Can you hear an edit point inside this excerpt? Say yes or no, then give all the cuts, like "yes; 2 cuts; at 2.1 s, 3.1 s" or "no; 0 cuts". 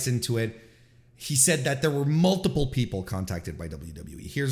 no; 0 cuts